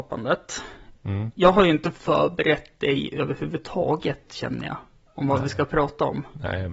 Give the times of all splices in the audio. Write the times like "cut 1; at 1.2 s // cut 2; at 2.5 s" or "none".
none